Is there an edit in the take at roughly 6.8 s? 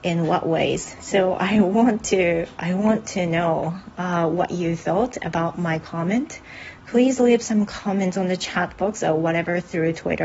no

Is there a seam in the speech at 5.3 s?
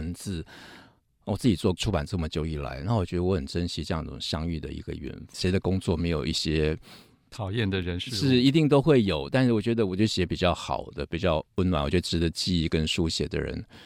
yes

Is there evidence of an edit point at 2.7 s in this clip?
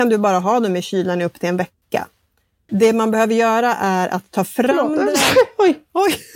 yes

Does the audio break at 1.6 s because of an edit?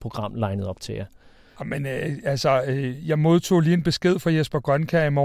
yes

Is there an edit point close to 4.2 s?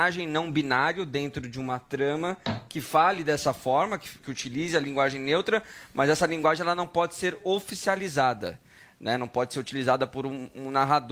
yes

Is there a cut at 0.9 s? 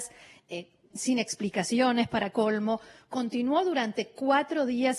yes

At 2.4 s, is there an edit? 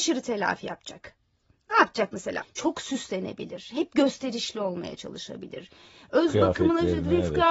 yes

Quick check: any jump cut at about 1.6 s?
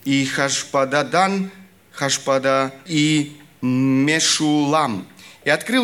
no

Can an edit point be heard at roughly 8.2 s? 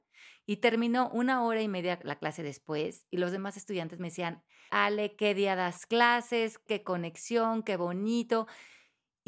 no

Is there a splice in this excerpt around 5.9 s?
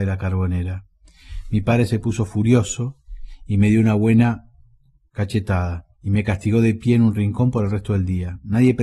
yes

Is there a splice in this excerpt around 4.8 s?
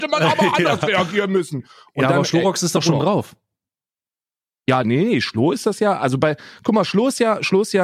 yes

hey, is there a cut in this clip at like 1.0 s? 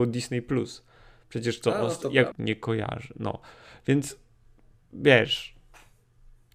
no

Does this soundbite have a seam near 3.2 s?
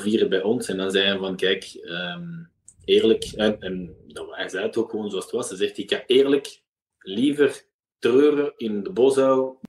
no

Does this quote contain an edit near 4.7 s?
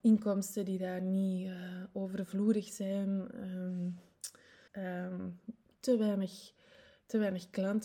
yes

